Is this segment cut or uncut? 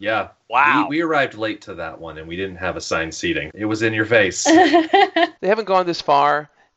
cut